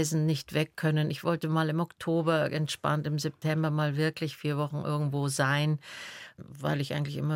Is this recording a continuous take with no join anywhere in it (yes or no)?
yes